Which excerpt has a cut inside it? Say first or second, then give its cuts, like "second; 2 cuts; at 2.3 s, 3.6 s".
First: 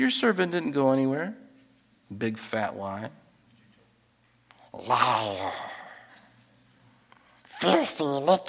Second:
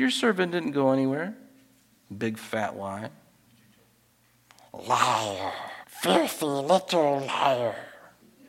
second; 1 cut; at 5.8 s